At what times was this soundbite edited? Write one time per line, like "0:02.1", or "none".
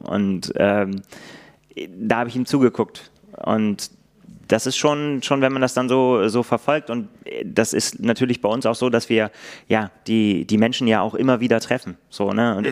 none